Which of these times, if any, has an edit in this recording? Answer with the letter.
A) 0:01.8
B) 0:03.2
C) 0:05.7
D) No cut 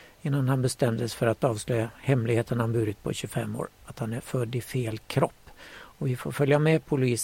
D